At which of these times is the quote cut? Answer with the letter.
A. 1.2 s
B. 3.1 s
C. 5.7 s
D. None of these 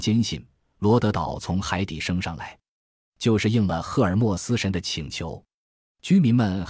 D